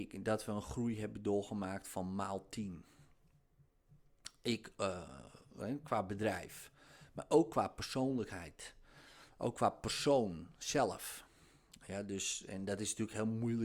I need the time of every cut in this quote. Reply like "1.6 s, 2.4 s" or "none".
12.4 s